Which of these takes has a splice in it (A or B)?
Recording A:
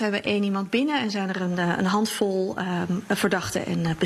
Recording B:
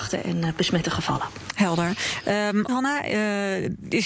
B